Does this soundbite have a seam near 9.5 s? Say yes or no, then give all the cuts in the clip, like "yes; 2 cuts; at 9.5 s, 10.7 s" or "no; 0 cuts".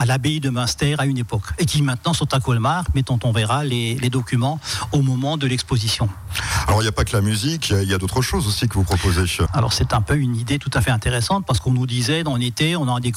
yes; 1 cut; at 9.5 s